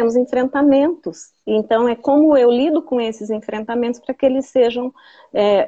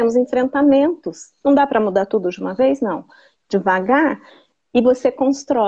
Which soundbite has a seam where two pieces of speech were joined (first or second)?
second